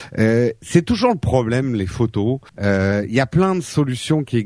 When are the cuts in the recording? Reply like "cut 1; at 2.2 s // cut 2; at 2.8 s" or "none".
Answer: cut 1; at 2.5 s